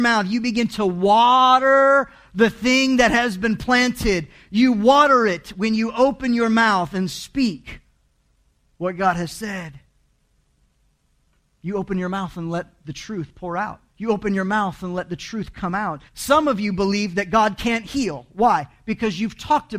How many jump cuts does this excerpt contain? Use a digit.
2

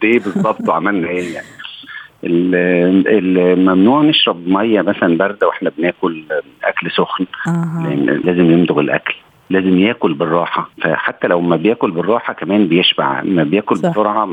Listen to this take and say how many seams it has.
2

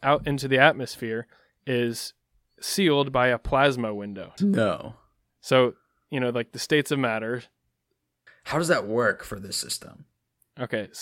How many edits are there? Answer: 2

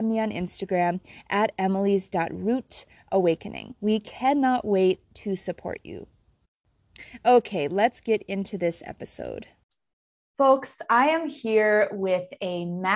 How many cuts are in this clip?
1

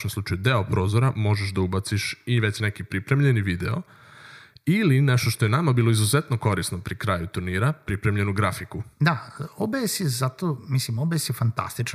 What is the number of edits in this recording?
1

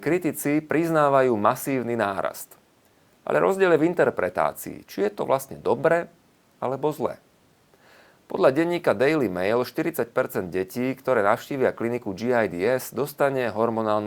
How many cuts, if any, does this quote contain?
0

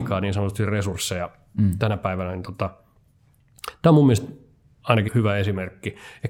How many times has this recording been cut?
1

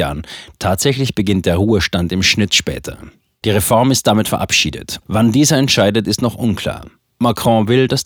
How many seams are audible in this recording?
2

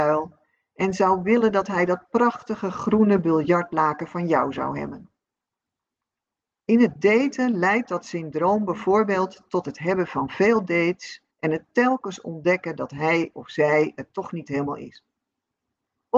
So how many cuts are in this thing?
2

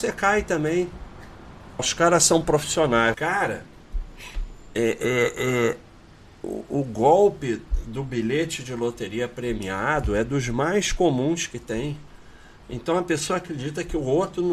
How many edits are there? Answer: 2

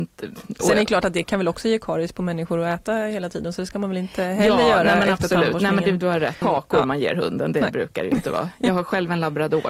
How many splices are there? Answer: 1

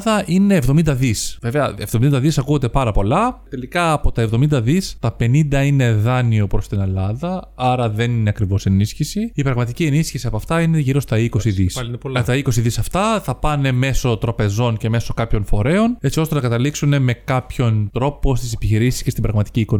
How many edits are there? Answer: 0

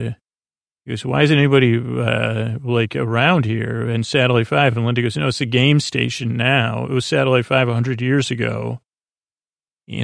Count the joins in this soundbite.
0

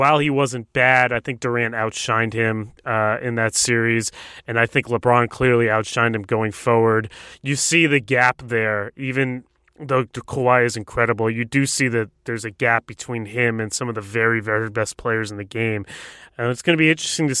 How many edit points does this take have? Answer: 0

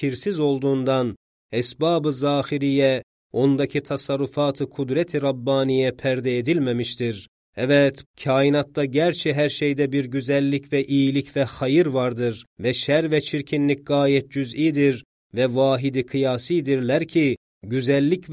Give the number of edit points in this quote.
2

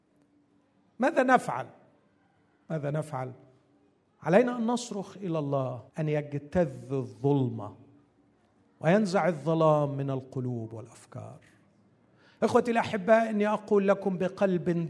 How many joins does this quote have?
1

